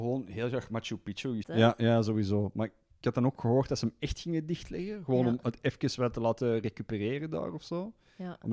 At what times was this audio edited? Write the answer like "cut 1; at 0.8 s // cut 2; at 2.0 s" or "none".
cut 1; at 1.4 s